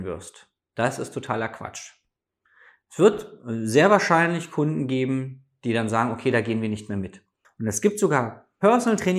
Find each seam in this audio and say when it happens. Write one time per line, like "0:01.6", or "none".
0:07.4